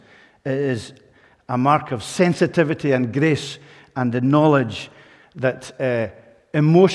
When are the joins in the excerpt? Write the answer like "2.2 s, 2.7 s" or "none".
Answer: none